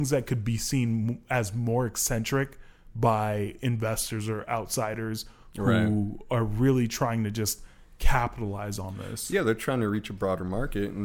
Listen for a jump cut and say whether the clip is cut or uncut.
uncut